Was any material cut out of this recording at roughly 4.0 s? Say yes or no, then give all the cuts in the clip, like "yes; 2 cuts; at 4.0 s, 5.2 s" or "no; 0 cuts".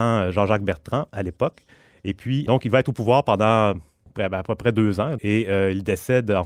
no; 2 cuts; at 2.5 s, 5.2 s